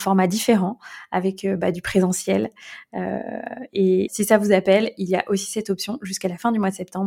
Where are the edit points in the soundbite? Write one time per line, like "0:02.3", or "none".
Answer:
0:04.1